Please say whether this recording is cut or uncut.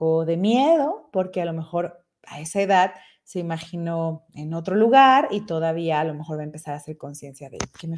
uncut